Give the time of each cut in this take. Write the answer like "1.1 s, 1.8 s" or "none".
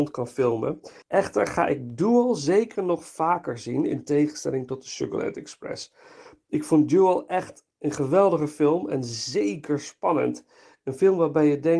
1.0 s

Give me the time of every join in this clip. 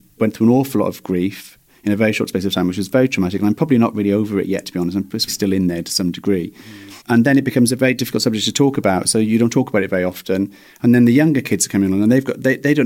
5.3 s, 7.0 s

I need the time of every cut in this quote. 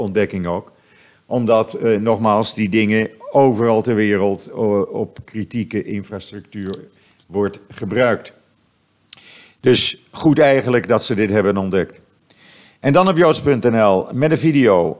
none

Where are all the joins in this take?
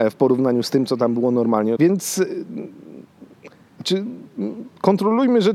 1.8 s

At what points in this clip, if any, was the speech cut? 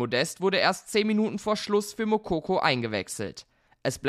none

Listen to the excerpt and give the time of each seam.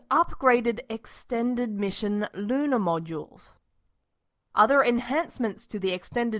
4.4 s

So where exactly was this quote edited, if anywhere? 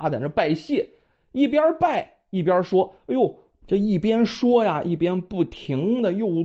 3.6 s

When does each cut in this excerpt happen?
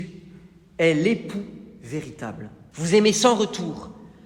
2.7 s

